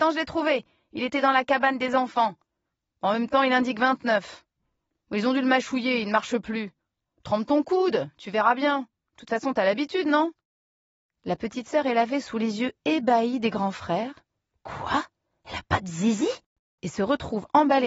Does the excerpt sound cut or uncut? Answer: uncut